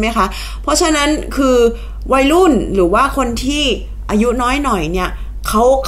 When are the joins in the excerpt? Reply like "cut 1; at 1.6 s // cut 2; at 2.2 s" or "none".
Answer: cut 1; at 4.1 s